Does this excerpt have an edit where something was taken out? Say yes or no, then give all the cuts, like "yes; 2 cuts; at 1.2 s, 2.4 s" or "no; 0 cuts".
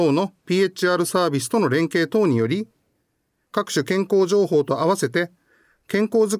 no; 0 cuts